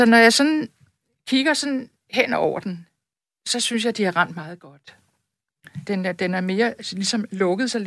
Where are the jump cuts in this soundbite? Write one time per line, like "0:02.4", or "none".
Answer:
0:05.8